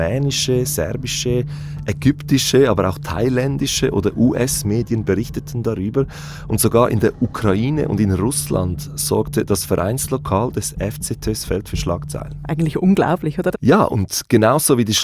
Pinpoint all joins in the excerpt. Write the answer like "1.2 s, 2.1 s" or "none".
13.5 s